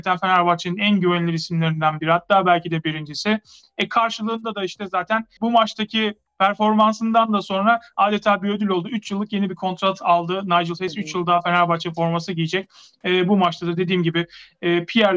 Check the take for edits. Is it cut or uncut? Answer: uncut